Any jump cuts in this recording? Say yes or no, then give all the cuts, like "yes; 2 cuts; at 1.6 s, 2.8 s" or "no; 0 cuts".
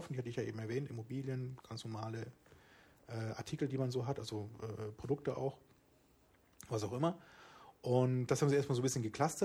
no; 0 cuts